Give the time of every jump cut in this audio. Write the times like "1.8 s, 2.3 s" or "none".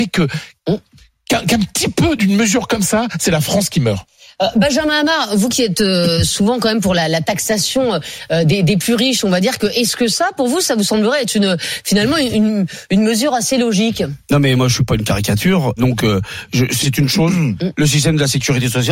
15.8 s, 16.8 s